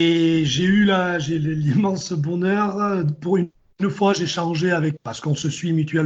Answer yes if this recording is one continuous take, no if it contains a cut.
no